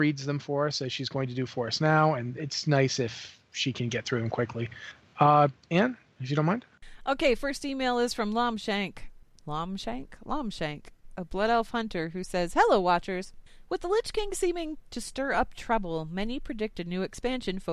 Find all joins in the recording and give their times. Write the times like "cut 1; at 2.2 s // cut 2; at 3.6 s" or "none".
none